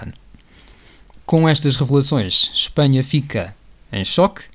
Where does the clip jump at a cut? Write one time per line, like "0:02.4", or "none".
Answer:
0:01.1